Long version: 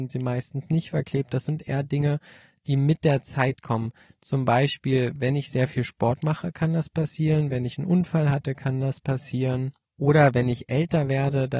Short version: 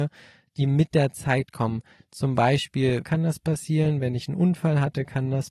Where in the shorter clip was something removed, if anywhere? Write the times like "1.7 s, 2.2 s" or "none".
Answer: 3.0 s